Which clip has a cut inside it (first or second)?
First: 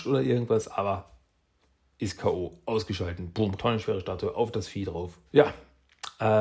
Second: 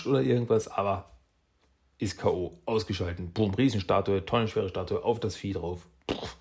first